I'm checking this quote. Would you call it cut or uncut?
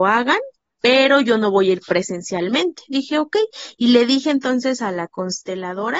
uncut